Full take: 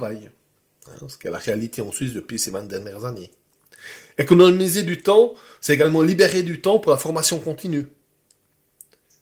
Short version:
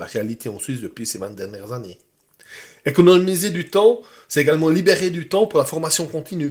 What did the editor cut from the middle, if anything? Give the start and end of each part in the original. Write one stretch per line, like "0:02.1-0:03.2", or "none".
none